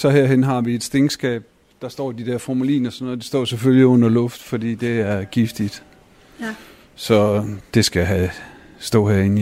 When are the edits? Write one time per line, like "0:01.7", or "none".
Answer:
0:07.7